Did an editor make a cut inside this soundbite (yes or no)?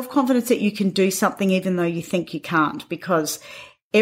no